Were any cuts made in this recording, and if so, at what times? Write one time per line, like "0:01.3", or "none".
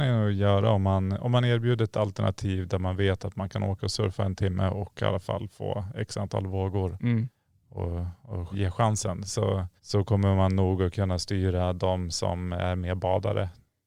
0:08.5
0:09.8